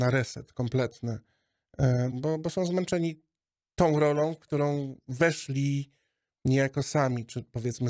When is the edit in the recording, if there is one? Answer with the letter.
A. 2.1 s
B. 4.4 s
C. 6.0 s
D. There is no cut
A